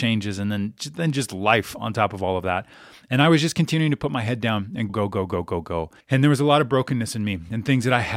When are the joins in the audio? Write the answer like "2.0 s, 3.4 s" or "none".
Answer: 4.9 s, 6.0 s